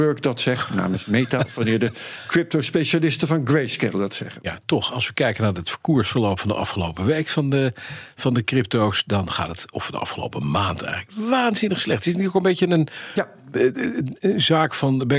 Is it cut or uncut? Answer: uncut